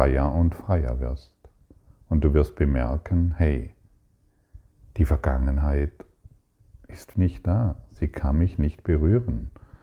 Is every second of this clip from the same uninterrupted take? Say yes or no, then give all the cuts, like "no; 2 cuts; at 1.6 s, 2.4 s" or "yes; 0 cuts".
no; 1 cut; at 7.1 s